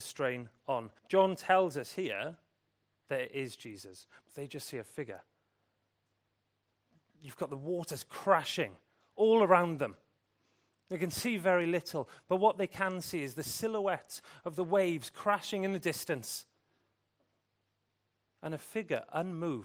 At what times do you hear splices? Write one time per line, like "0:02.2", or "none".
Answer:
0:01.0
0:04.2